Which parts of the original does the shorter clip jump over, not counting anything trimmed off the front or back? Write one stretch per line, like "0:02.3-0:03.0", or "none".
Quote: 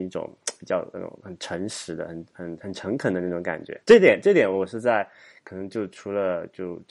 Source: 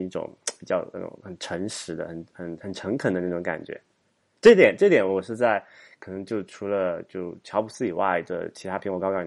0:03.8-0:04.4